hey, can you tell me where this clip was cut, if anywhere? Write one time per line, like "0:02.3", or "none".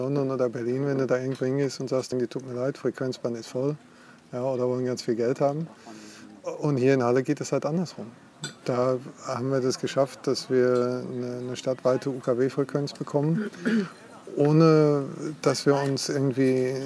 0:02.1